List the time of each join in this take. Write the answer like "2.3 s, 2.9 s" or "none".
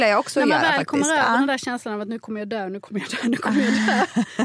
none